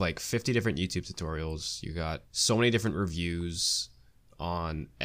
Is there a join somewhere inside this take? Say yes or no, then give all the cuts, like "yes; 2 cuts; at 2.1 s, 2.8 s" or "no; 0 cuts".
yes; 1 cut; at 2.3 s